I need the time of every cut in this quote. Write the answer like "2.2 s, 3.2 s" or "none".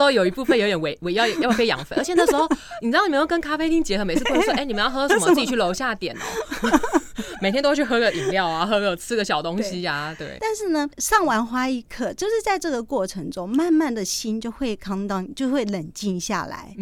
10.4 s